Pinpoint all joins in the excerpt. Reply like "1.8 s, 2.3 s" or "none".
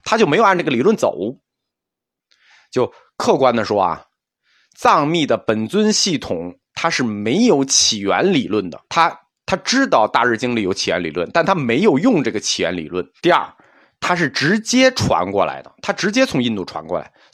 8.9 s, 13.2 s